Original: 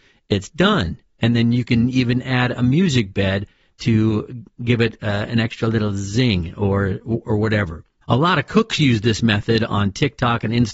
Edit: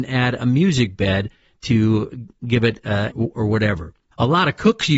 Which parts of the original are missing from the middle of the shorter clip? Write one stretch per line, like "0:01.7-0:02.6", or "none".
0:05.3-0:07.0